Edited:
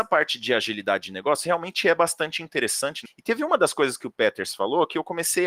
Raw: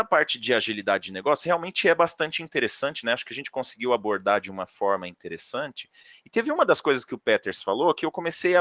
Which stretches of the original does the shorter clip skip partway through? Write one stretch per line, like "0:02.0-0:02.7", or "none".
0:03.0-0:06.1